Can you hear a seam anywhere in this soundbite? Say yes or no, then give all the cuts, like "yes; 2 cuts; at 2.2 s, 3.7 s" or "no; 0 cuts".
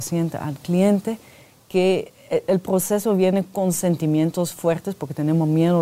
no; 0 cuts